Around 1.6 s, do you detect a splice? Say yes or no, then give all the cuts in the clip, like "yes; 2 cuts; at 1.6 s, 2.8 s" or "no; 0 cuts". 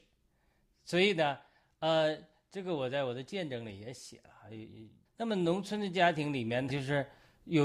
yes; 3 cuts; at 1.6 s, 5.0 s, 6.7 s